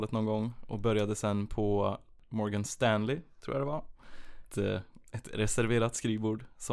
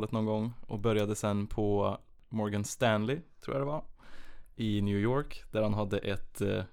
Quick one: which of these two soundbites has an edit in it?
first; 1 cut; at 4.5 s

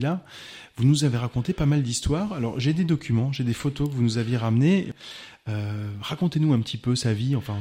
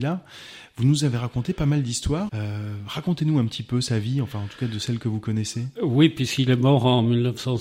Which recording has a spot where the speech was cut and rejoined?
second; 1 cut; at 2.3 s

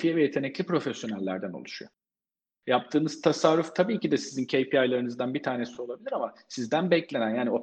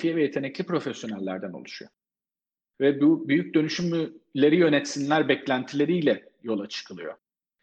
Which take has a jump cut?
first; 1 cut; at 2.5 s

